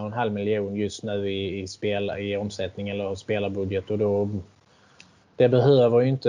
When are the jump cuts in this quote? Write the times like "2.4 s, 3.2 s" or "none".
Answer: none